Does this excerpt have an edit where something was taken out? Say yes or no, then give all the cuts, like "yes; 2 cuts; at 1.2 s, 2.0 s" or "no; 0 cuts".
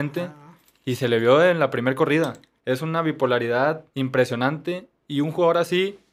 yes; 2 cuts; at 2.6 s, 3.9 s